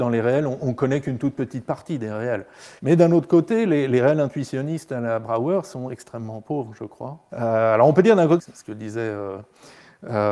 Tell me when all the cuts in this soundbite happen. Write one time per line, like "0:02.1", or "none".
0:02.8
0:07.3
0:08.4